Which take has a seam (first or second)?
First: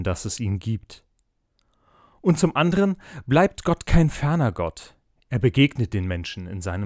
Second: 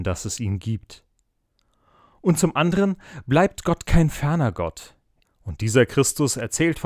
second